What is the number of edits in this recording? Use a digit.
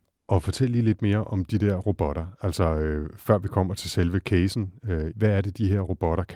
1